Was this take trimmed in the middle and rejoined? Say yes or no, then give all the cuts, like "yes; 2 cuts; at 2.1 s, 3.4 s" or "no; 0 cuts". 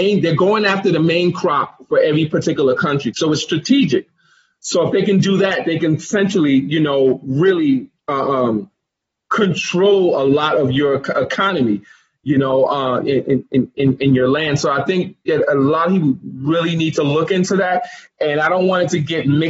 no; 0 cuts